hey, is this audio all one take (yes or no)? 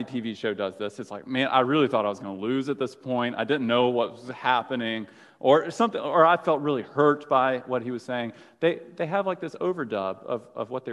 yes